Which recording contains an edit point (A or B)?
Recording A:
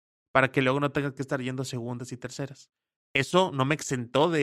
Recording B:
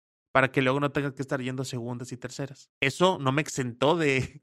B